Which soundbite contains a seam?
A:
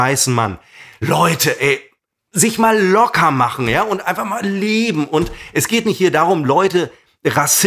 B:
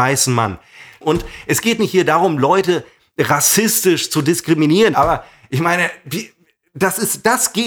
B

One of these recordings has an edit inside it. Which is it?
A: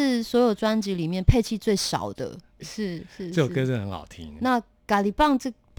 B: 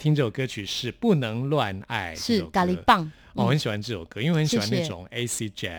A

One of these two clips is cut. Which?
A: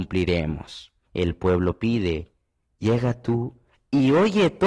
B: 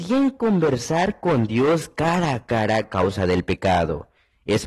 A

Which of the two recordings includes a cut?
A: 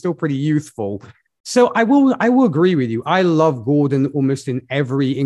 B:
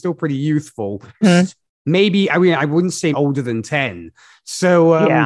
B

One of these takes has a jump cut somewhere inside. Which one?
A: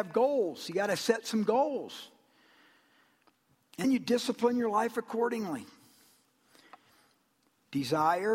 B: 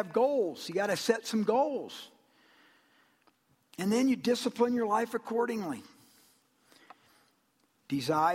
A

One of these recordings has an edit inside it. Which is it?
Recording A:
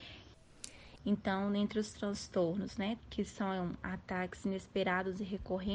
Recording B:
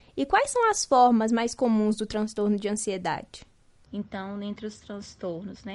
A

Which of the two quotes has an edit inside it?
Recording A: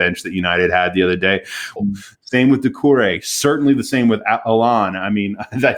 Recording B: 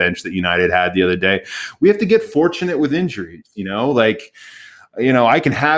A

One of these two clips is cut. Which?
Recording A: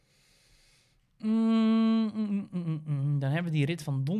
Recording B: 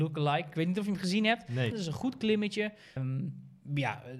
B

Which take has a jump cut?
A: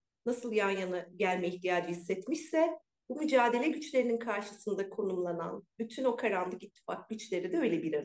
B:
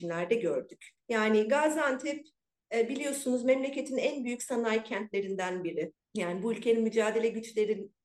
B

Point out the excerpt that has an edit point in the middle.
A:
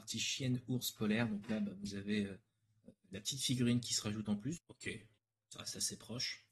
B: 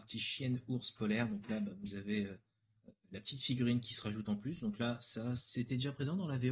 A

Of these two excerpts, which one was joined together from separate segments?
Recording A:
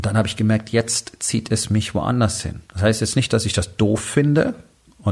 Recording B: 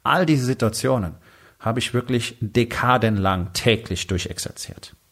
A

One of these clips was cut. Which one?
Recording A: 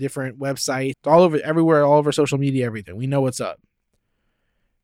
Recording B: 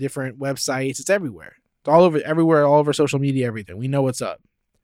A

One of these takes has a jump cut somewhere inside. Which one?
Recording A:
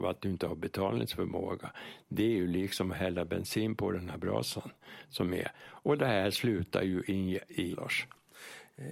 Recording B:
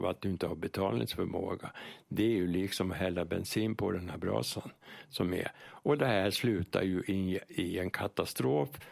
A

